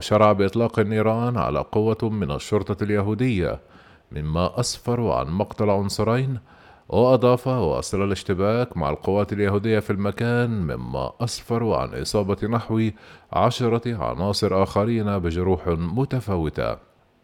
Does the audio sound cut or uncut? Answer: uncut